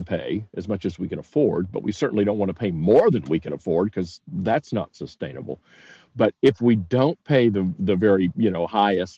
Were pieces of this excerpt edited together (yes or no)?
no